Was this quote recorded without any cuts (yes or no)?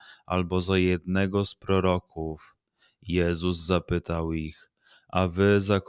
yes